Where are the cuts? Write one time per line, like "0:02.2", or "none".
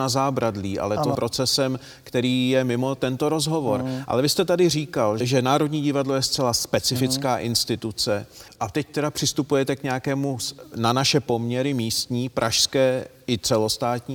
0:01.1